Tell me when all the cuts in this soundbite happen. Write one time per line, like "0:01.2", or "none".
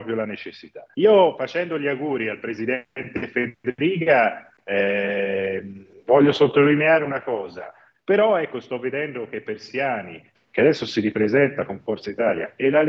0:00.9
0:07.9
0:10.3